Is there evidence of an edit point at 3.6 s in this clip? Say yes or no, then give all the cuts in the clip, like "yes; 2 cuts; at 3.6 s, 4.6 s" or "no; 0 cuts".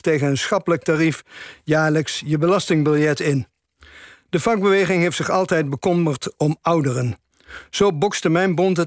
no; 0 cuts